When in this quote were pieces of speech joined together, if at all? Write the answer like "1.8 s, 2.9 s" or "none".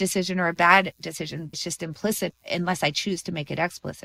1.5 s

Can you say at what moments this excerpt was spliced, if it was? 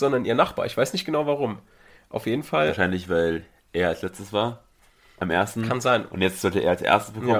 none

